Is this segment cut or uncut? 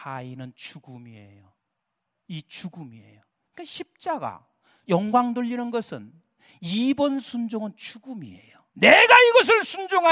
cut